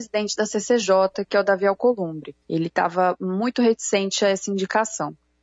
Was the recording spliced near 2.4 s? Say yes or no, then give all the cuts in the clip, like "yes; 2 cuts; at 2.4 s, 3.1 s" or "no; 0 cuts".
yes; 1 cut; at 2.4 s